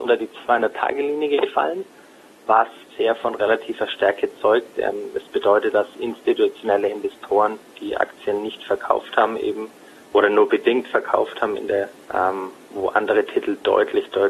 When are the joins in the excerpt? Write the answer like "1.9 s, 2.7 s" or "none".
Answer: 2.9 s, 12.0 s